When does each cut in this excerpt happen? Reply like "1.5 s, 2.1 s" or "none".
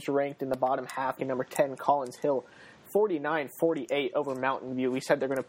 1.2 s